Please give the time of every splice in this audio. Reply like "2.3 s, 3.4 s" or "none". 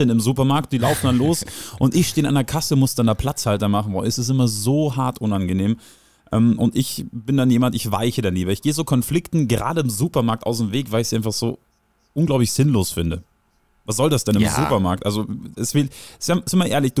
none